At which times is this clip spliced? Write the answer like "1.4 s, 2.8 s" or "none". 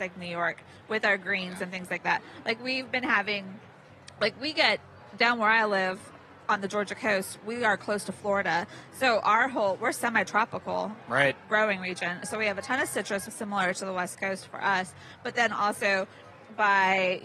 13.3 s